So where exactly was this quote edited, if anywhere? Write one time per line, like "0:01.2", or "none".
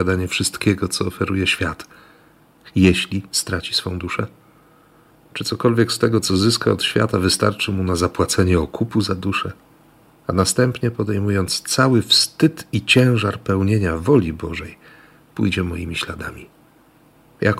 0:10.1